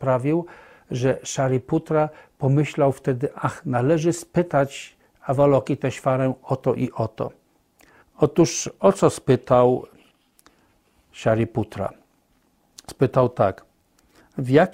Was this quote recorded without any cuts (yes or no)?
no